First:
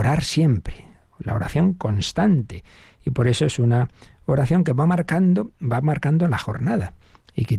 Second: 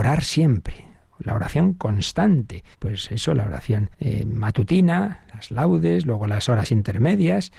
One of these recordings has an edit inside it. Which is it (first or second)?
second